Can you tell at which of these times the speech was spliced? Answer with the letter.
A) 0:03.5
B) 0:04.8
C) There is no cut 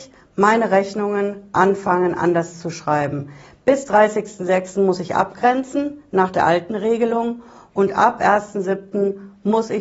C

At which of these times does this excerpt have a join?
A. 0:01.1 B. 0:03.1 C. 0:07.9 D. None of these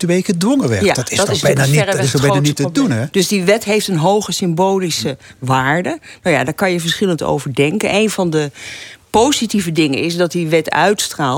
B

